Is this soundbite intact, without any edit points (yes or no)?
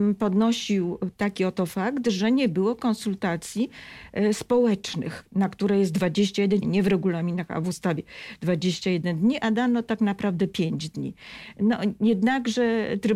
no